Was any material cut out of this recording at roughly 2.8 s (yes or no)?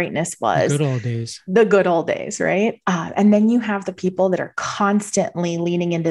no